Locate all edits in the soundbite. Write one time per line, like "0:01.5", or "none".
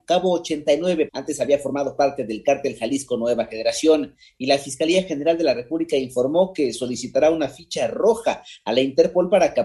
0:01.1

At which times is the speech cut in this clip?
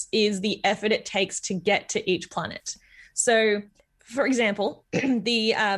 none

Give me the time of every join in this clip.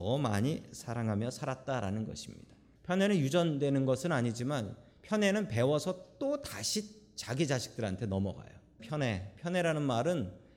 0:02.8
0:08.8

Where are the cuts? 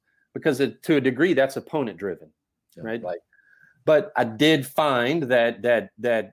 0:03.0

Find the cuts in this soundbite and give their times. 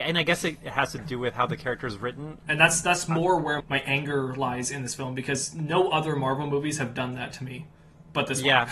0:02.4
0:03.6

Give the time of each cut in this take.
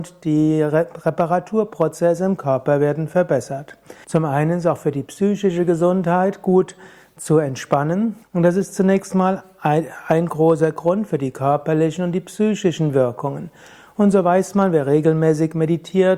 0:04.0
0:08.2

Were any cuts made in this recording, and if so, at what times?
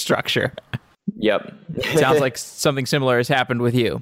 none

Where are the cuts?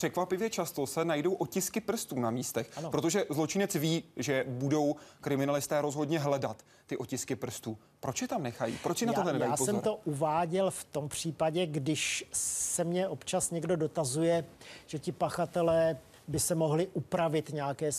none

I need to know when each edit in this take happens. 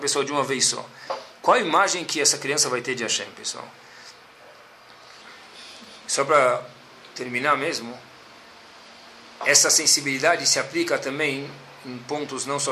none

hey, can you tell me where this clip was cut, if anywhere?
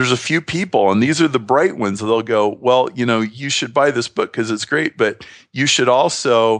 none

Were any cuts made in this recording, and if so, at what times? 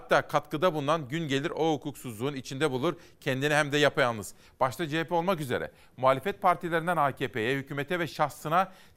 0:04.4

